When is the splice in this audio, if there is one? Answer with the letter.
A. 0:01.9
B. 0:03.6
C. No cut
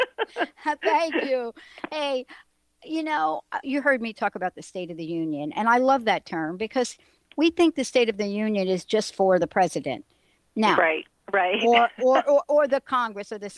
B